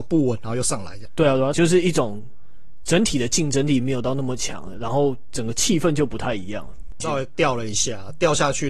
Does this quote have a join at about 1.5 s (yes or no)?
yes